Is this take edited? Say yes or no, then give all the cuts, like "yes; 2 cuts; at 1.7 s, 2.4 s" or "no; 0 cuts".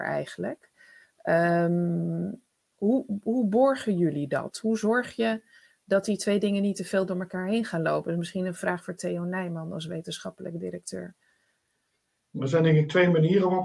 no; 0 cuts